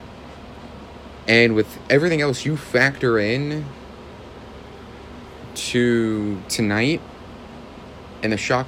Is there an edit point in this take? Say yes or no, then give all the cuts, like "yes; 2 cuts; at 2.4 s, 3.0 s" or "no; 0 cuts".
no; 0 cuts